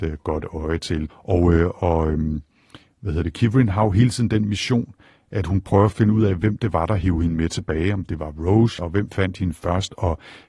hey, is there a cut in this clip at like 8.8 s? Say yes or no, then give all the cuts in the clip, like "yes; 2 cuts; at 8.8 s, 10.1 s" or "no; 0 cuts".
yes; 2 cuts; at 1.1 s, 8.8 s